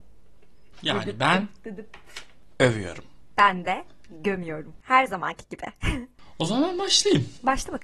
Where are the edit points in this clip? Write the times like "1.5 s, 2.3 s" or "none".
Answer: none